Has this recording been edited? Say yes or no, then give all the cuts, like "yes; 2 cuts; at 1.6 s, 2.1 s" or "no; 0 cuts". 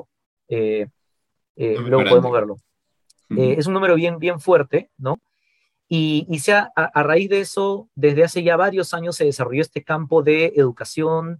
no; 0 cuts